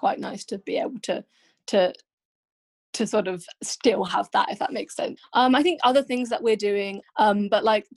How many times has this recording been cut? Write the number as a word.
two